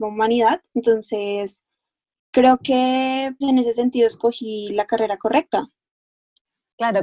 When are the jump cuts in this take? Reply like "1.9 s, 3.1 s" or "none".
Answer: 3.4 s